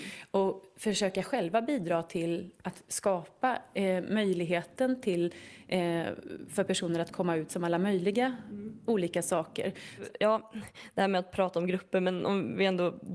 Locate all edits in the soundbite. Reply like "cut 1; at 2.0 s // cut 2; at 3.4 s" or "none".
none